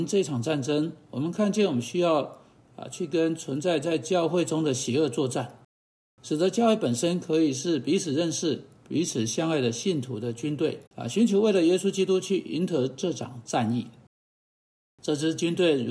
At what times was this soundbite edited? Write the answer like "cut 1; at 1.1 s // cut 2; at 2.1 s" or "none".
cut 1; at 10.9 s